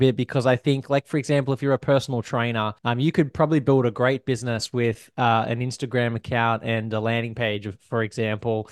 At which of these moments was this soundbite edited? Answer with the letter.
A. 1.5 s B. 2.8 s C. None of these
B